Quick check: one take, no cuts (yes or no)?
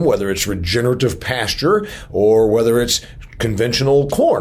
yes